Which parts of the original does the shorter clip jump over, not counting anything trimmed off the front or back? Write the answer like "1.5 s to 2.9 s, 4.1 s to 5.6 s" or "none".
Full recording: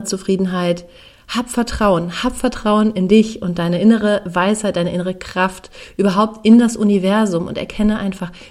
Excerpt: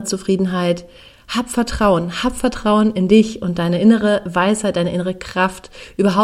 none